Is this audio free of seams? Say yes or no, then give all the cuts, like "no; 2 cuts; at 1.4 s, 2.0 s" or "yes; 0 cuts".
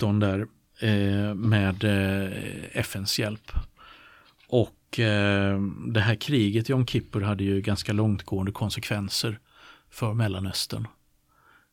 yes; 0 cuts